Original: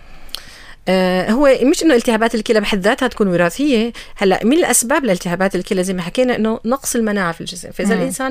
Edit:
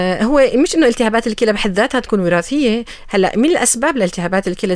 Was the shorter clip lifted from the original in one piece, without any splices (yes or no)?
yes